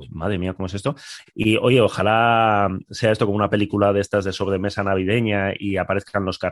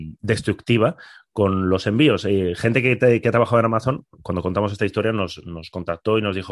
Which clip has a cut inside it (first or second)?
first